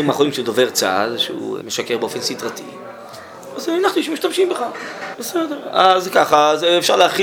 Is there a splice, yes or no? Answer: yes